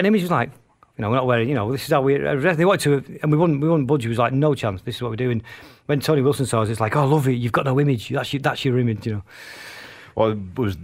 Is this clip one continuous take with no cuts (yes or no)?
yes